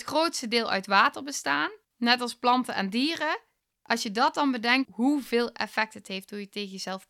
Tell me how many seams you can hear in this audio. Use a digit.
1